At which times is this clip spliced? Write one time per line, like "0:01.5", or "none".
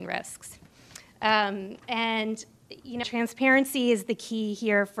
0:03.0